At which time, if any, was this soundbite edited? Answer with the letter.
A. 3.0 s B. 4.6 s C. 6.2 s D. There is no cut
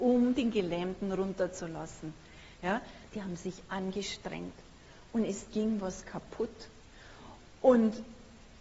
A